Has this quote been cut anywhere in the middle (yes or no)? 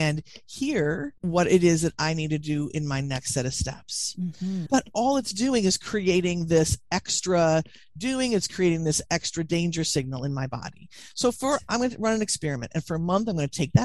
yes